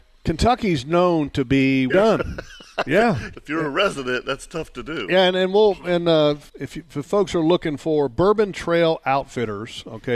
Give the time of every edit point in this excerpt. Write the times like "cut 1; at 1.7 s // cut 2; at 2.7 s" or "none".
cut 1; at 1.9 s // cut 2; at 3.3 s // cut 3; at 6.5 s